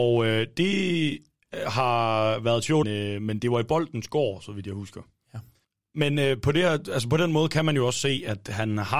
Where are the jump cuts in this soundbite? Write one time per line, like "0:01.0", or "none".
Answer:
0:02.8